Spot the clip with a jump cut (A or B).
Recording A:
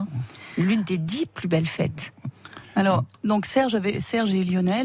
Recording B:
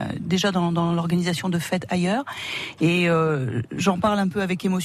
B